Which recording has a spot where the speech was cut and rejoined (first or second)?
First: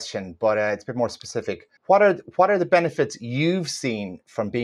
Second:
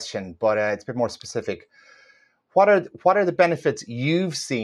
first